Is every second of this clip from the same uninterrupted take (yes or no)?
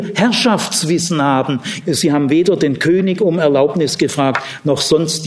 no